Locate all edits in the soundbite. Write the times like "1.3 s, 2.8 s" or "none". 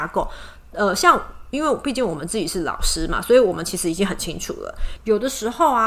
5.0 s